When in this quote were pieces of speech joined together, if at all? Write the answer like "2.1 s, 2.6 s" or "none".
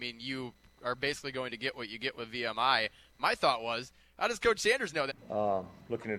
5.1 s